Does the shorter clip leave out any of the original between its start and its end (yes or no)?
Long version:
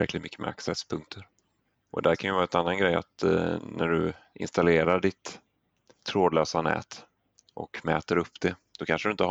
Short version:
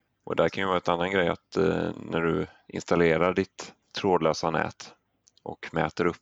yes